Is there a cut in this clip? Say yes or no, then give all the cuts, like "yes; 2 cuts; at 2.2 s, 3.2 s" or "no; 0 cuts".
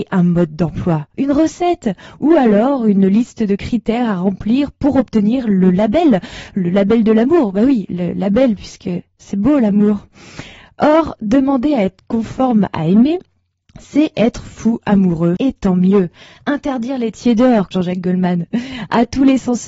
yes; 2 cuts; at 15.4 s, 17.7 s